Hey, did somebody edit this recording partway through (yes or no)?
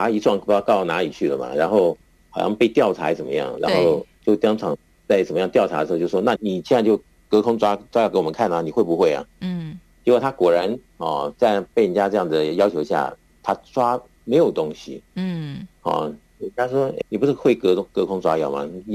yes